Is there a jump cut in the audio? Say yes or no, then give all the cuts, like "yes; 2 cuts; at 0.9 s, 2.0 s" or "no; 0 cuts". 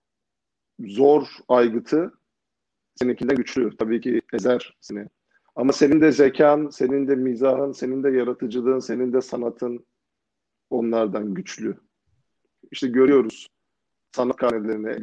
yes; 1 cut; at 12.6 s